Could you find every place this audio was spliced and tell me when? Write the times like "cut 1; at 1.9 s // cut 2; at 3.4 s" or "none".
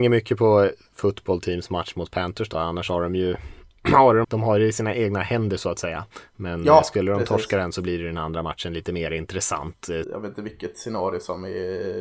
cut 1; at 4.2 s // cut 2; at 10.0 s